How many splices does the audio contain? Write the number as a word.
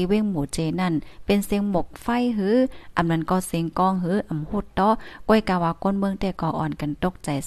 one